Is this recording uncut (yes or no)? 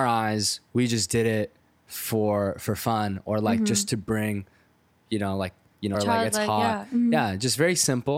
no